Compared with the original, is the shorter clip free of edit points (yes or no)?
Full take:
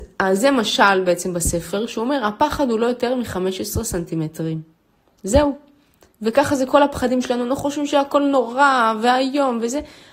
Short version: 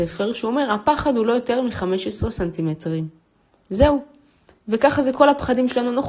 yes